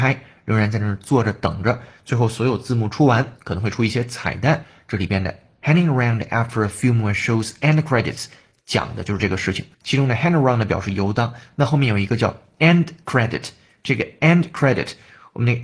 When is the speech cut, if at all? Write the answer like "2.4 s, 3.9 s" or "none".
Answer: 9.7 s